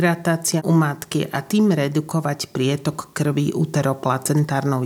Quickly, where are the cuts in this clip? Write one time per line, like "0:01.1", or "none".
none